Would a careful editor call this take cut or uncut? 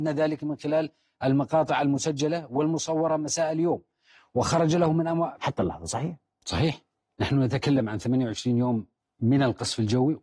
cut